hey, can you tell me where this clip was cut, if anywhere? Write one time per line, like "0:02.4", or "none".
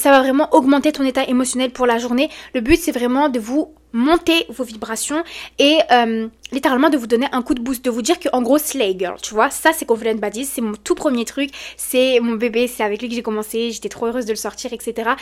none